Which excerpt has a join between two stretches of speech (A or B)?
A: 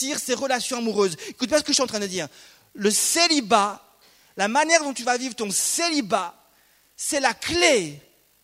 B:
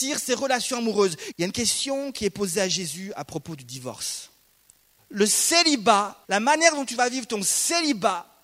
B